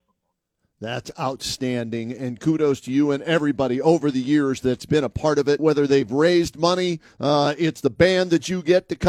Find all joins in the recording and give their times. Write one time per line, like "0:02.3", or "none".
0:05.6